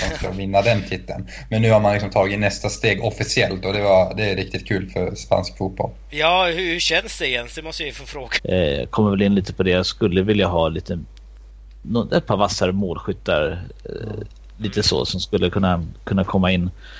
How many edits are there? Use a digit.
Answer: 1